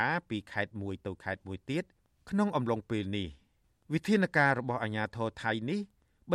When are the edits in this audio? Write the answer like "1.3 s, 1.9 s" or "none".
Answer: none

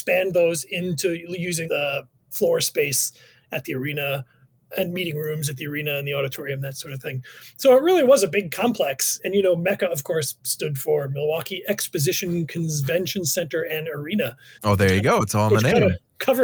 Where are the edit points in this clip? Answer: 1.7 s

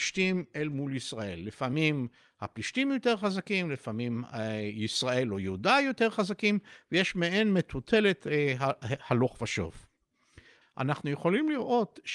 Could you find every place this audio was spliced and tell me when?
10.6 s

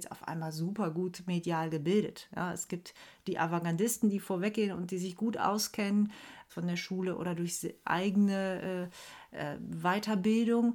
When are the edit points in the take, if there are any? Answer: 6.5 s

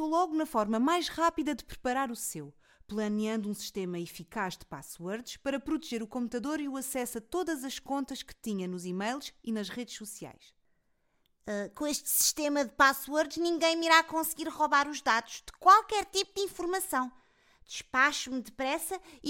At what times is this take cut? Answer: none

